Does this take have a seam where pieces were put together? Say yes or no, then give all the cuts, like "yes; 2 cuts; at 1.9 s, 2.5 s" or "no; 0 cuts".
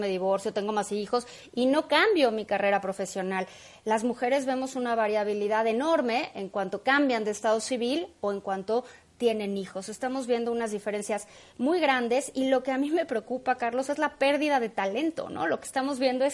no; 0 cuts